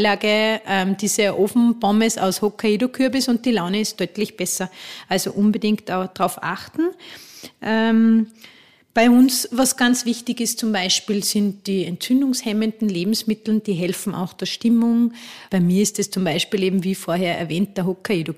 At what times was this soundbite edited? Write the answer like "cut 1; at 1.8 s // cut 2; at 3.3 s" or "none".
cut 1; at 15.5 s